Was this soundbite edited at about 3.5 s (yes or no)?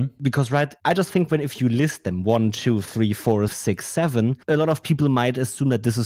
yes